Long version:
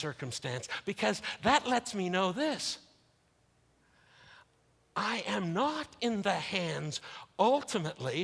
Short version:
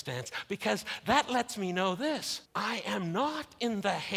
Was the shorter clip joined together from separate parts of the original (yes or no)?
yes